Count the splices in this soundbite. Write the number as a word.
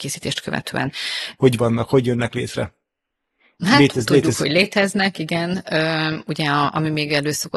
one